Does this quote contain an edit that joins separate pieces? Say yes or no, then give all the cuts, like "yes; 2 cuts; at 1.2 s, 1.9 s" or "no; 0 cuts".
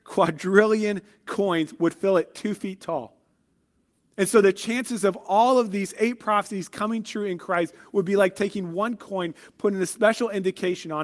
no; 0 cuts